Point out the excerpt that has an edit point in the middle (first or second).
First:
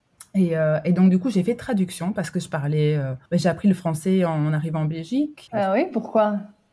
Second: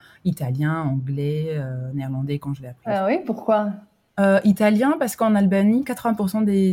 first